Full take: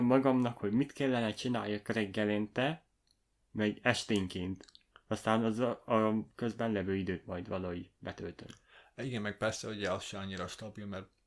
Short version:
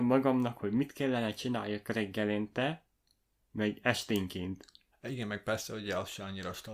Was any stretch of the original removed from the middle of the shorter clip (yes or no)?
yes